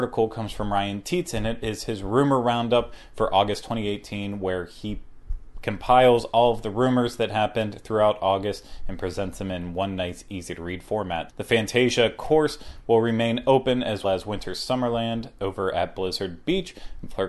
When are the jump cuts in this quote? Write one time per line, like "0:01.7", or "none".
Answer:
0:05.5
0:11.3
0:14.0